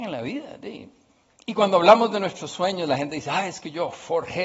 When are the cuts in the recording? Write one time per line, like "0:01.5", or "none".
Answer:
0:01.3